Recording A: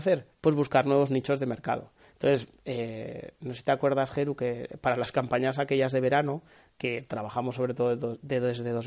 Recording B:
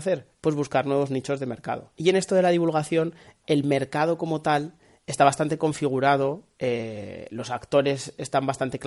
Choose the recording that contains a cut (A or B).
B